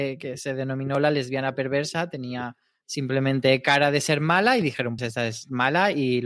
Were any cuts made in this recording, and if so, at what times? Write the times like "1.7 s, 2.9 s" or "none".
5.0 s